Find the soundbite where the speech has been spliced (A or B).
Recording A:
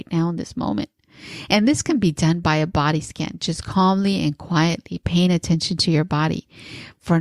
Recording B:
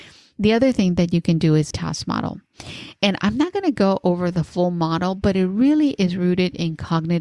B